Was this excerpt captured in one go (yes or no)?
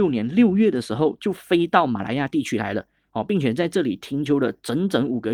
yes